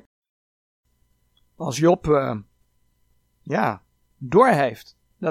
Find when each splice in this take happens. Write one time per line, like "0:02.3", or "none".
none